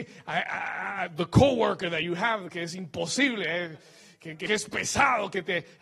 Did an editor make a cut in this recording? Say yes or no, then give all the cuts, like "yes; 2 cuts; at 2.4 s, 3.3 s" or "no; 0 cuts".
yes; 1 cut; at 4.5 s